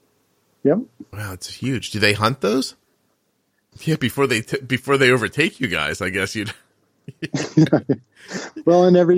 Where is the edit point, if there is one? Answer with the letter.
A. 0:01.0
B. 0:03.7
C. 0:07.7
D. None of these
B